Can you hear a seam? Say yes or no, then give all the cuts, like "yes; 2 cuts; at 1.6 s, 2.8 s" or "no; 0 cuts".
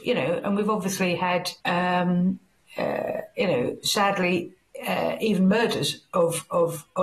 yes; 1 cut; at 1.6 s